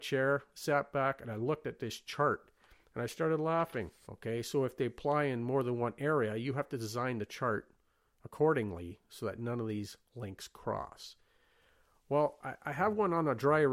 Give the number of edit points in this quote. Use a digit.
1